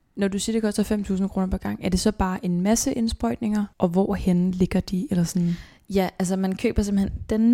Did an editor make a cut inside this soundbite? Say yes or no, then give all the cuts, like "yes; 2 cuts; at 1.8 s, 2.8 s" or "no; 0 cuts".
no; 0 cuts